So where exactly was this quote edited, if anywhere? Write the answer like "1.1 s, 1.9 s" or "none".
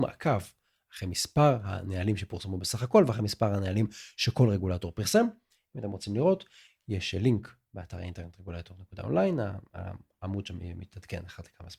none